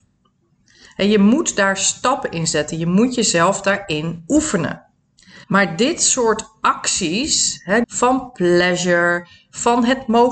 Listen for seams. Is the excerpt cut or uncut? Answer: cut